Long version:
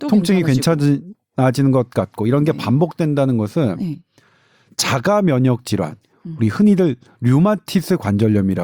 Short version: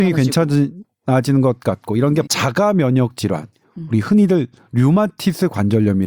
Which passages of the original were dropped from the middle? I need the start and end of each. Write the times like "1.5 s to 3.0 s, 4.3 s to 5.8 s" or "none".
2.6 s to 4.7 s